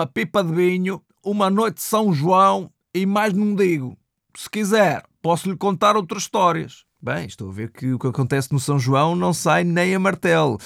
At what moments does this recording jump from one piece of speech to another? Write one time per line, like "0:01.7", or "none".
0:01.2